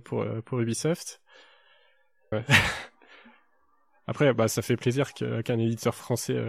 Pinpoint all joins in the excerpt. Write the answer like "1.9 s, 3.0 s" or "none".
2.3 s

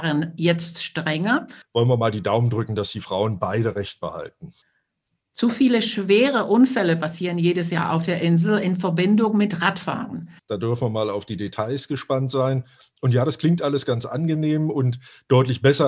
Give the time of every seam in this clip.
1.6 s, 10.4 s

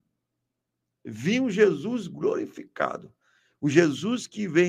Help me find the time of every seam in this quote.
none

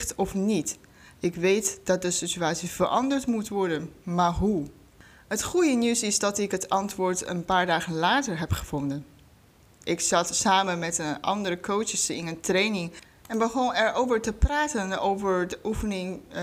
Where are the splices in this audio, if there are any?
none

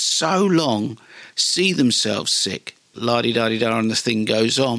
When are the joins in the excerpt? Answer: 2.9 s

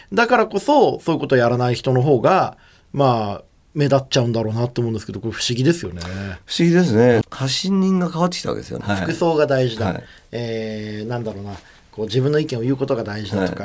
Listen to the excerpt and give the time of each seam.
7.2 s, 8.8 s

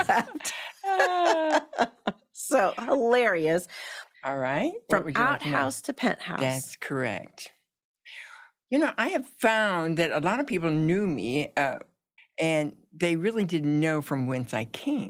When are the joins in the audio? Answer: 4.1 s, 12.2 s

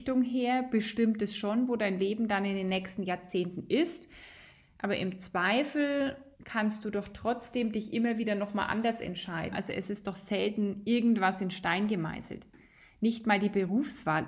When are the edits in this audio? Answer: 6.3 s, 9.5 s

